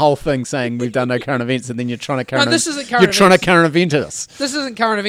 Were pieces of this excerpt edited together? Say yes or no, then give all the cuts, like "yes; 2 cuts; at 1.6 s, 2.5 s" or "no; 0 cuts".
no; 0 cuts